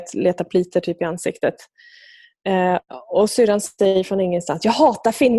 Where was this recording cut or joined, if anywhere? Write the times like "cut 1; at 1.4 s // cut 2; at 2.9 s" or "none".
none